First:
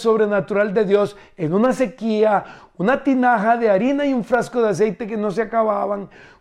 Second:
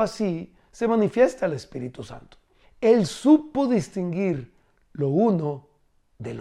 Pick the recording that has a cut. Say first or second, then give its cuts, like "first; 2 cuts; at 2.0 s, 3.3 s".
second; 1 cut; at 2.6 s